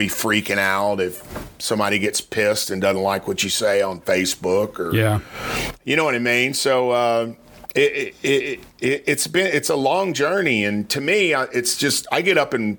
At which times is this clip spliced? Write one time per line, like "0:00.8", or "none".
none